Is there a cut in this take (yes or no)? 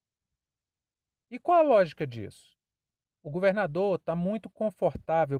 no